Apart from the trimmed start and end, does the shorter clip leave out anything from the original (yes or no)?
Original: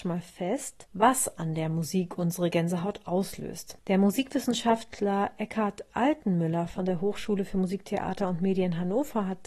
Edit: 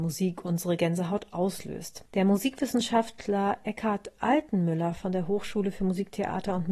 no